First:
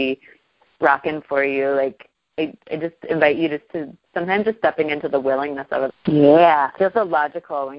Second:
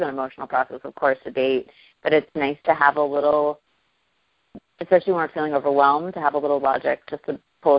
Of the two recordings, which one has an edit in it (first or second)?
first